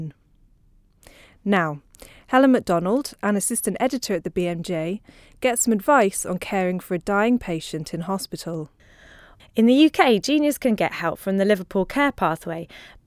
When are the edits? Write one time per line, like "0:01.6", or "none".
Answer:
0:09.4